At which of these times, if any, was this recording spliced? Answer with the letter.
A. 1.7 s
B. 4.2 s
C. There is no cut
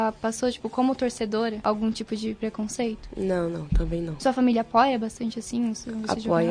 C